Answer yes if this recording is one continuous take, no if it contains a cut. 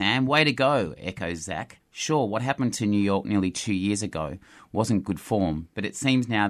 no